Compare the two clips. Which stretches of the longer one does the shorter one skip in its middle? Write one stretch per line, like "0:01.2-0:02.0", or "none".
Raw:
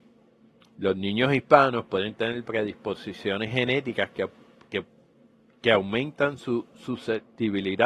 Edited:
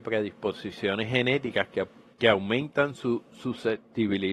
0:04.5-0:05.5